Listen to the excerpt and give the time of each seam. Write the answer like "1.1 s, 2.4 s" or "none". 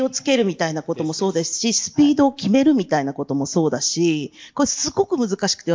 none